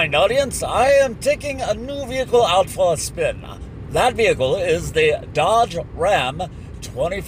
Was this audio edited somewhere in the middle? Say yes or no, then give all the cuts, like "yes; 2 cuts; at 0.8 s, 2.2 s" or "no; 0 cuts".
no; 0 cuts